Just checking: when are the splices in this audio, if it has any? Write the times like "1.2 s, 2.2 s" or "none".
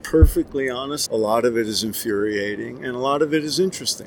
1.1 s